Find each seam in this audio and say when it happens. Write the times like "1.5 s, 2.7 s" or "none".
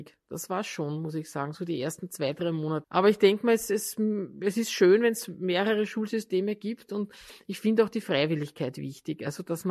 2.8 s